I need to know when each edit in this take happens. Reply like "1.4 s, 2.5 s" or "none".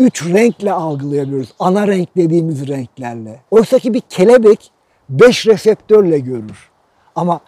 3.5 s